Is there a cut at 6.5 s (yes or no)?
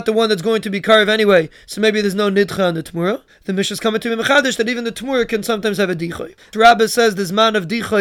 yes